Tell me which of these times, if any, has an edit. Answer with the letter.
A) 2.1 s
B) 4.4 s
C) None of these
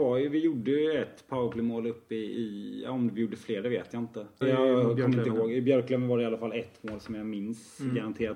B